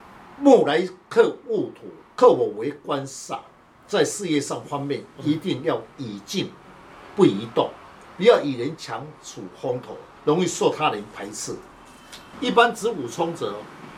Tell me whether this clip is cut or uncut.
cut